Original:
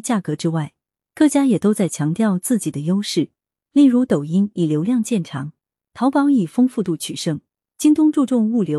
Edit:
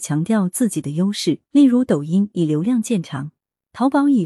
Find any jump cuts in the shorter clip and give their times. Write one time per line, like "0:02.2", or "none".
0:01.5